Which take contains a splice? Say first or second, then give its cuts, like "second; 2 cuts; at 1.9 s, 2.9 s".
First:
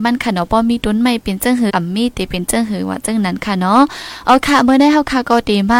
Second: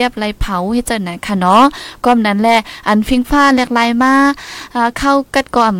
first; 1 cut; at 1.7 s